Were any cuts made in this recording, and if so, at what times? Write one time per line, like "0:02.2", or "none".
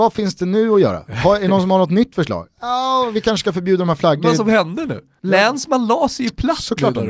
0:04.2